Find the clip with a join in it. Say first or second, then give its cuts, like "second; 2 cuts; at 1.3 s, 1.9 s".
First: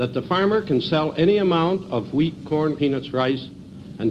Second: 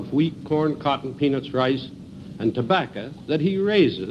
first; 1 cut; at 2.8 s